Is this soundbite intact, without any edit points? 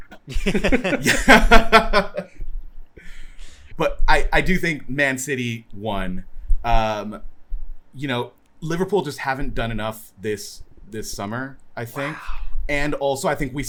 no; 1 cut; at 3.7 s

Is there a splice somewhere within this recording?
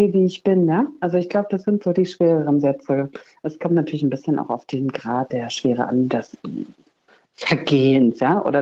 no; 0 cuts

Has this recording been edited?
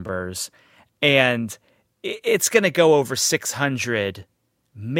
no; 0 cuts

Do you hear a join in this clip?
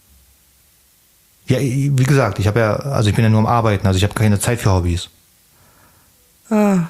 no; 0 cuts

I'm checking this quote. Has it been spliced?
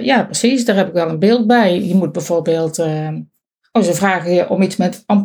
no; 0 cuts

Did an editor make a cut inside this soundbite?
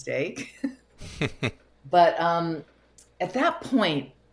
no; 0 cuts

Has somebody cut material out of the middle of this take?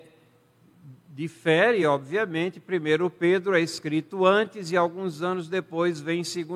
no; 0 cuts

